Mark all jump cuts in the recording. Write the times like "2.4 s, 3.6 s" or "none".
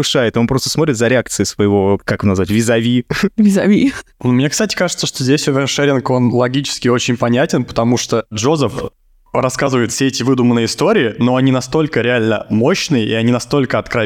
4.1 s

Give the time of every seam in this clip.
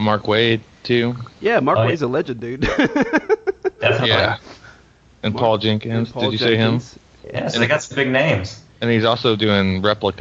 7.2 s

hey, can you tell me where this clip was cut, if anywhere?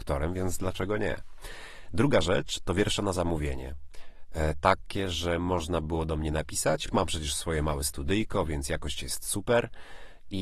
none

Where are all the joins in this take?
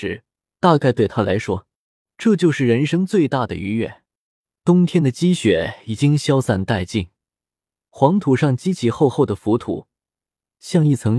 none

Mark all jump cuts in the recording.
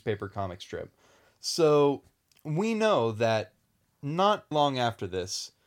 1.2 s, 4.5 s

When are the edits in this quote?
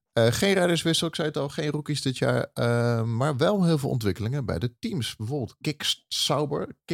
none

